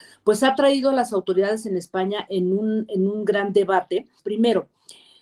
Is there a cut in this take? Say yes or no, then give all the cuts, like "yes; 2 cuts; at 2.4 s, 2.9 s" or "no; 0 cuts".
yes; 1 cut; at 4.2 s